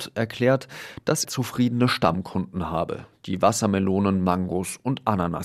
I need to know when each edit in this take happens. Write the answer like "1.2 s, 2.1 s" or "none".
1.2 s